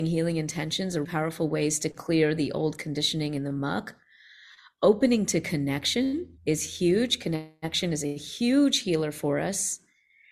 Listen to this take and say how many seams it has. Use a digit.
2